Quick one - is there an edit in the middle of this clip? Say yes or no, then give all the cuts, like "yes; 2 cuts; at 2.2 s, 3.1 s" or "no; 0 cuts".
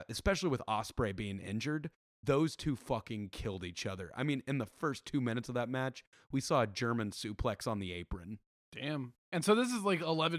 no; 0 cuts